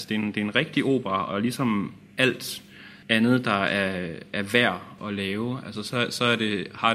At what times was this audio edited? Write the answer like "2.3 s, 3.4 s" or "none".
3.0 s, 5.0 s

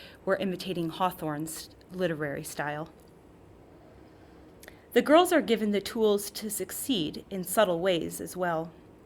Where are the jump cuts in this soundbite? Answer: none

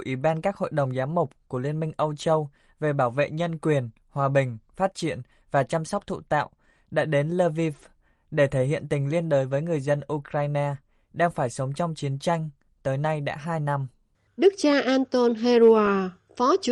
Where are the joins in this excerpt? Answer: none

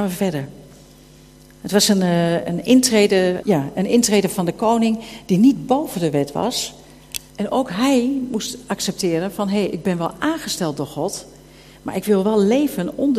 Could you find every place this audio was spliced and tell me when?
3.4 s, 7.3 s

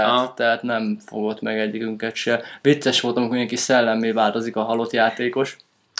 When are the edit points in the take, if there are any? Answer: none

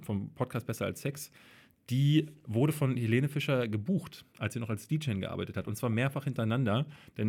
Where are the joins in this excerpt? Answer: none

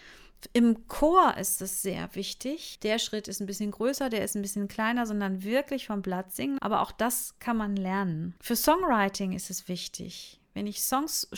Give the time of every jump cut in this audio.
2.7 s, 6.6 s, 8.4 s

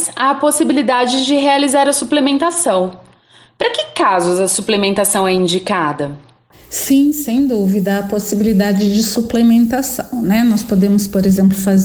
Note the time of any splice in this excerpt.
none

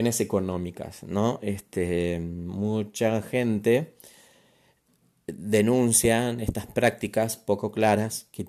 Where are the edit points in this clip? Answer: none

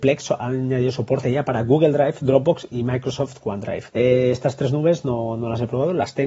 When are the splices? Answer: 3.9 s

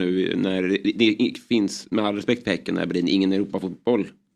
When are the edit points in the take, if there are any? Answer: none

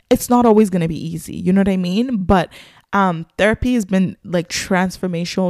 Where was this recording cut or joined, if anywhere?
none

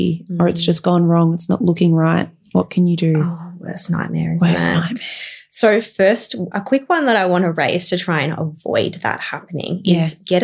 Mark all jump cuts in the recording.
none

